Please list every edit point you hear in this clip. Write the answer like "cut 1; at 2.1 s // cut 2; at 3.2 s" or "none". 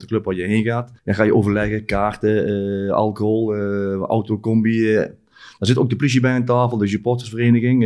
cut 1; at 1.0 s